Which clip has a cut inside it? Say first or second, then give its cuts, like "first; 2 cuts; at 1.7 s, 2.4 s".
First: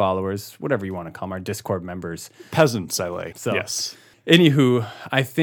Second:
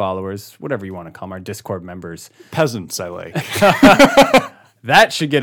first; 1 cut; at 3.3 s